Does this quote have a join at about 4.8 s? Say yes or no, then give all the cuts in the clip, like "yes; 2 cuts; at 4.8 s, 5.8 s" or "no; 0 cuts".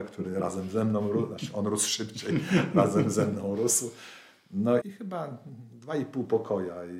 yes; 1 cut; at 4.8 s